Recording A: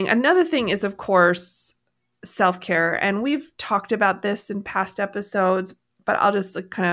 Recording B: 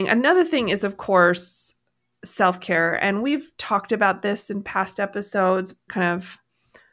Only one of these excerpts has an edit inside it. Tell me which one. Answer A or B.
B